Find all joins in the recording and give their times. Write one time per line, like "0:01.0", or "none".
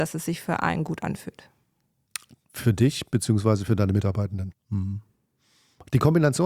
0:04.5